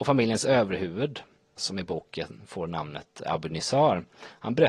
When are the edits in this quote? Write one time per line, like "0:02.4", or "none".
0:01.6